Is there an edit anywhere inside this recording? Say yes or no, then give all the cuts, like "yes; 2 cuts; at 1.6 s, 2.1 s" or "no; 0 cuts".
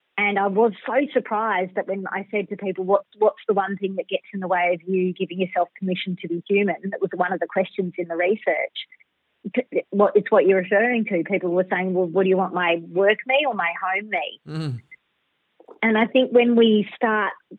no; 0 cuts